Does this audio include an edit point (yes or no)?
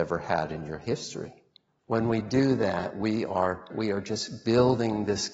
yes